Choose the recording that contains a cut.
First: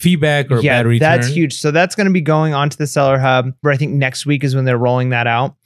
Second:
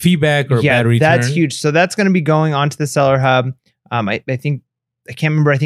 first; 1 cut; at 3.6 s

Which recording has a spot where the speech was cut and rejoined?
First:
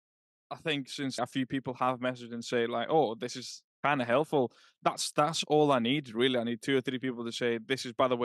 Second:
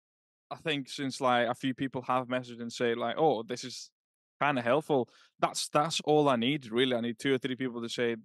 first; 2 cuts; at 1.2 s, 3.7 s

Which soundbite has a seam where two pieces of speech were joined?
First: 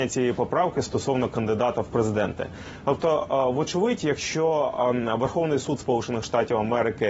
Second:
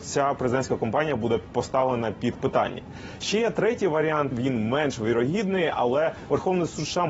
second; 1 cut; at 4.3 s

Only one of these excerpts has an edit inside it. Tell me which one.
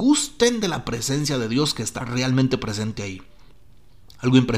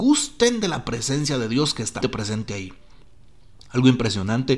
second; 1 cut; at 2.0 s

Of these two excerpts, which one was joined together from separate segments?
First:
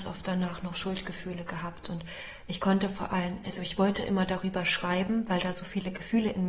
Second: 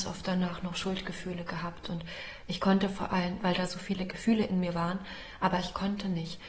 second; 1 cut; at 3.4 s

